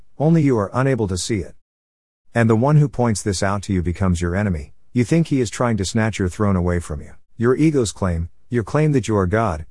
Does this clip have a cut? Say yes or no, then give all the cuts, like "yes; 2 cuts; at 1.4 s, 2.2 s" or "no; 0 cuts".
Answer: yes; 1 cut; at 7.3 s